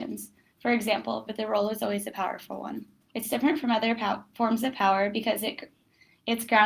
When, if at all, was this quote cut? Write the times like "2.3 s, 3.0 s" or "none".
1.3 s, 3.1 s

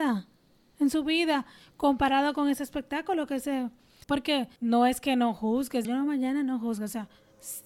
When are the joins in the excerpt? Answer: 4.0 s, 5.8 s

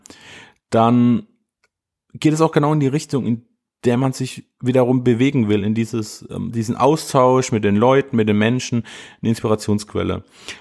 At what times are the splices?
none

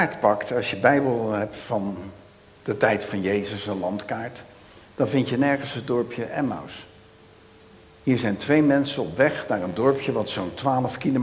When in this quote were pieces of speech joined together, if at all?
none

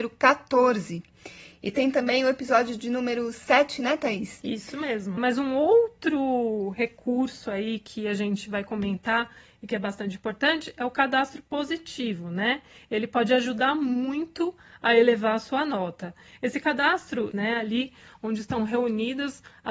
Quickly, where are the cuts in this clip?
5.2 s, 17.3 s

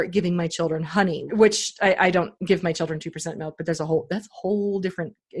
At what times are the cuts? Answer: 1.3 s

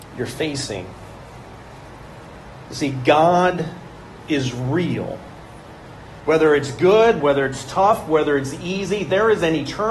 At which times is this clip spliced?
6.2 s, 7.2 s

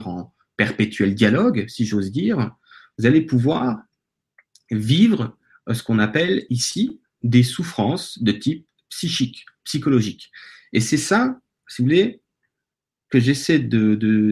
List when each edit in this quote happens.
none

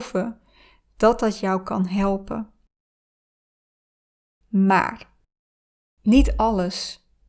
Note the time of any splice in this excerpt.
none

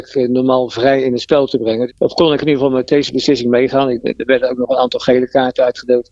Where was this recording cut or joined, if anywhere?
1.9 s

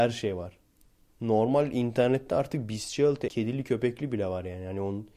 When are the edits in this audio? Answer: 3.3 s

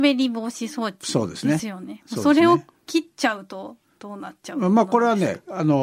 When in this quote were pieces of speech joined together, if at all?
none

